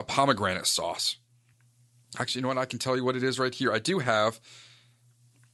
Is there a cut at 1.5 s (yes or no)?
no